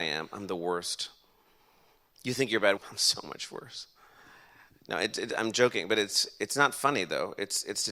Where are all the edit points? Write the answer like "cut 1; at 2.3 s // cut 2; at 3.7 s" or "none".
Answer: cut 1; at 2.8 s